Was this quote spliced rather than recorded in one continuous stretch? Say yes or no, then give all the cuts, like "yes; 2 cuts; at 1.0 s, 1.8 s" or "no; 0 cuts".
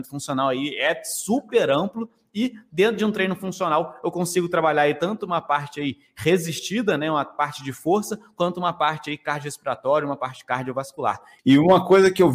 yes; 1 cut; at 11.4 s